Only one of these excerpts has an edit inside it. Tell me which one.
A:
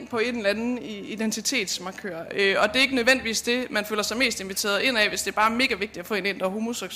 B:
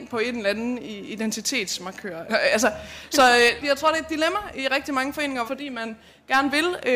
B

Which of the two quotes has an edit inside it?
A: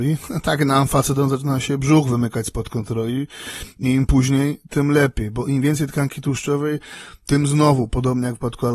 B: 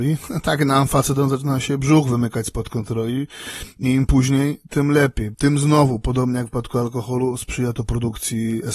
B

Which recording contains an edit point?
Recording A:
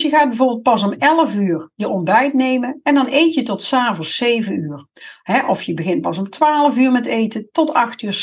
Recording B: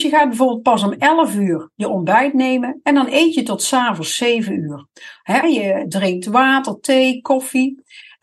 B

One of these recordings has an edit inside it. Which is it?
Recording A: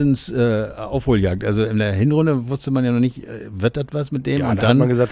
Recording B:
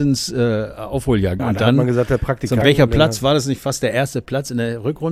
B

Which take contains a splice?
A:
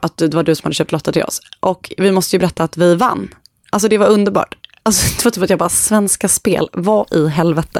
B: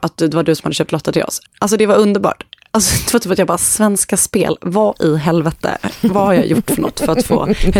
B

